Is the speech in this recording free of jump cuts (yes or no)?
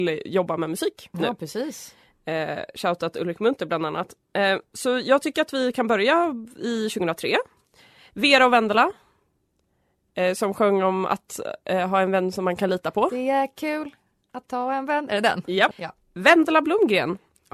no